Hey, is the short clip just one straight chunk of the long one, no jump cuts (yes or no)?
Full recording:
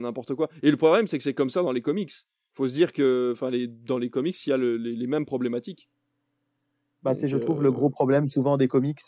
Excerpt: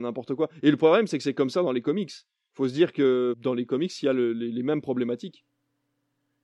no